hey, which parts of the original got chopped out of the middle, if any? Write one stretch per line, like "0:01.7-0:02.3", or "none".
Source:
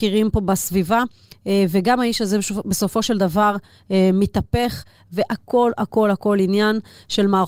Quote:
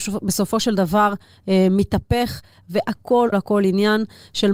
0:05.7-0:06.1